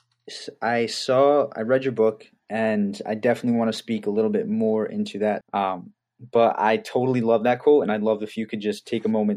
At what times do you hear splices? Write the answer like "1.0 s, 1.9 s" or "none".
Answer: 5.4 s